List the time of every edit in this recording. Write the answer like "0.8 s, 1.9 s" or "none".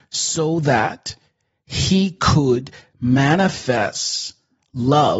none